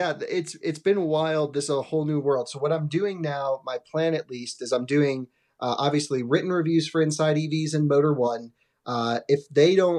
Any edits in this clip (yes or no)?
no